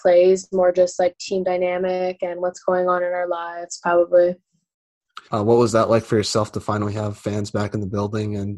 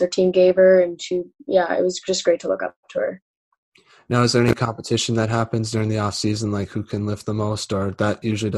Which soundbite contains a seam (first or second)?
first